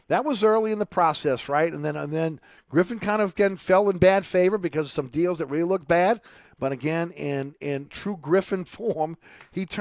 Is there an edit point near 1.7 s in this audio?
no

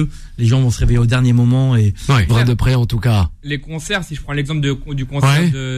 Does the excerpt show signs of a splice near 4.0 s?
no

